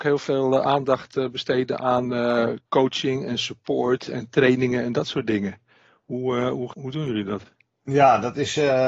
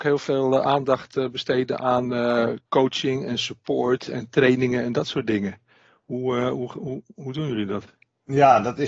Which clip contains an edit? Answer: first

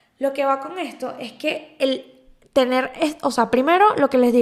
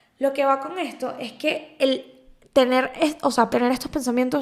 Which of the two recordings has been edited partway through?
second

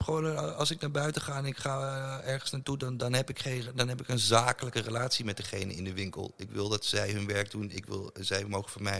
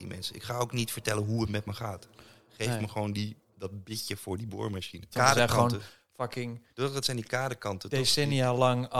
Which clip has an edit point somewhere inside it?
second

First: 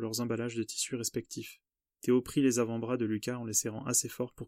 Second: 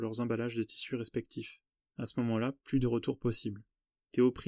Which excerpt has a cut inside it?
first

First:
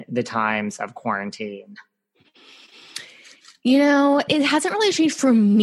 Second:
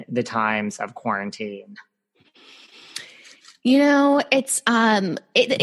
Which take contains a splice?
first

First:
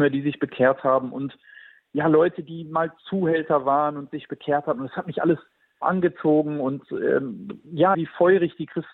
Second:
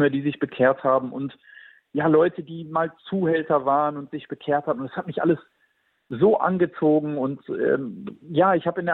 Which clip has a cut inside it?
first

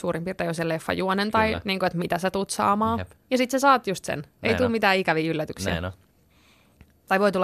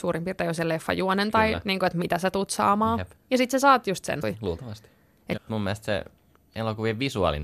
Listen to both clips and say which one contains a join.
second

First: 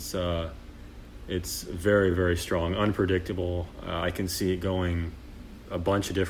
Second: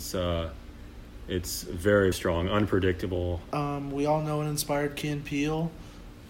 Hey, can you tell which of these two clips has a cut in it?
second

